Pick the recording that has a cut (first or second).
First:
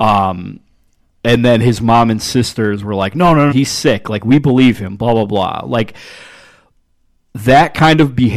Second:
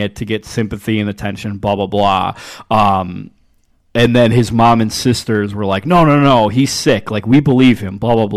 first